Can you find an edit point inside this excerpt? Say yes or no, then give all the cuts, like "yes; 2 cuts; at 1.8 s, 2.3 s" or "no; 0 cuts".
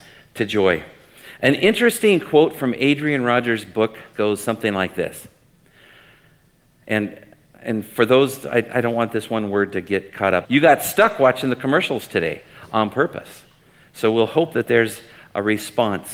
yes; 2 cuts; at 4.1 s, 10.4 s